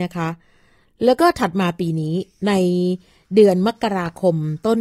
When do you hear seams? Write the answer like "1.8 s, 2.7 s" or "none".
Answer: none